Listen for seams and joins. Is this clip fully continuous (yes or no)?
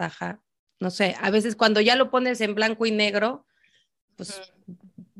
yes